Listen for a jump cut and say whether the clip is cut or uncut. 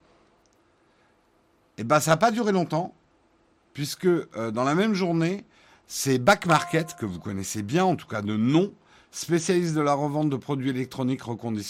uncut